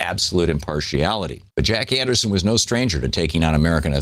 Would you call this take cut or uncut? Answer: cut